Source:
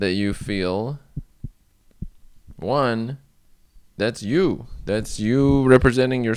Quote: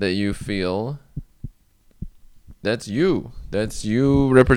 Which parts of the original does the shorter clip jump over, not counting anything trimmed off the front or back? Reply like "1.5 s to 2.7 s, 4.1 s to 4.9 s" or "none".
2.5 s to 3.9 s